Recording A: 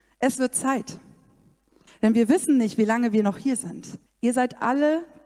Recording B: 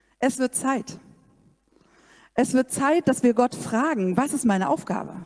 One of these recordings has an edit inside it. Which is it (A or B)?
A